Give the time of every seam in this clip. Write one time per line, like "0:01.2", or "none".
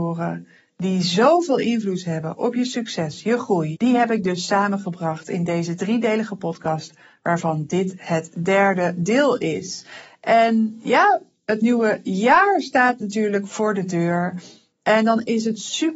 0:03.7